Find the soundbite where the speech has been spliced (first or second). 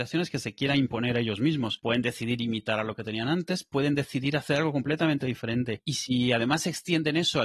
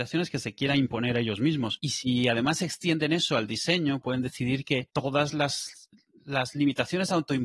second